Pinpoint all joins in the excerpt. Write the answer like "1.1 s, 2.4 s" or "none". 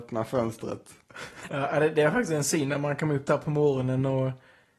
1.5 s